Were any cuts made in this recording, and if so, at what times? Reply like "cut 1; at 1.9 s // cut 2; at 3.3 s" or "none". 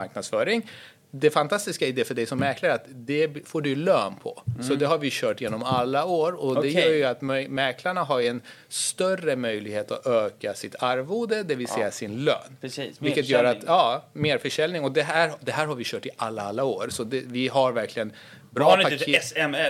none